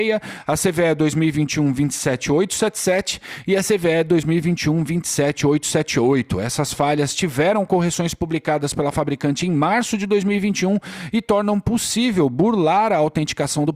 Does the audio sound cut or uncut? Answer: uncut